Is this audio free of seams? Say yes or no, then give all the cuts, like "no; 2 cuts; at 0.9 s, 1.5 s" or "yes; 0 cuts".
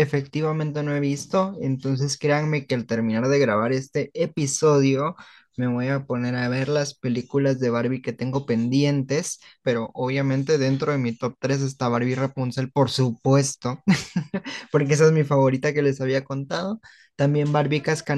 no; 1 cut; at 9.6 s